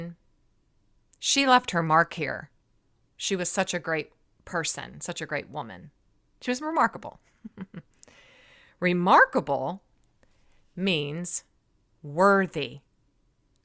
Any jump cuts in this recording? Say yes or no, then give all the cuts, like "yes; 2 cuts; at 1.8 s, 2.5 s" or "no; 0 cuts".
no; 0 cuts